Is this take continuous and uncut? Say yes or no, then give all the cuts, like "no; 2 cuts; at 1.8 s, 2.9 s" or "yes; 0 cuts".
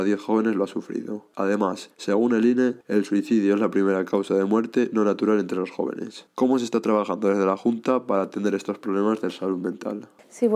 yes; 0 cuts